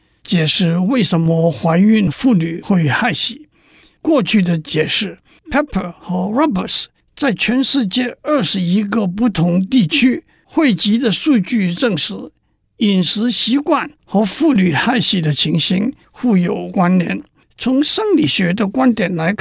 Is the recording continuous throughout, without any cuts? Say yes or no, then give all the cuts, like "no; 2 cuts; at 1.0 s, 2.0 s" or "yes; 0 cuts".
no; 2 cuts; at 5.4 s, 17.4 s